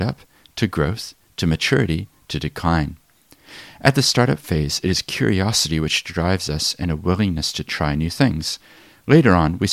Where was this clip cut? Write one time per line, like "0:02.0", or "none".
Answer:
none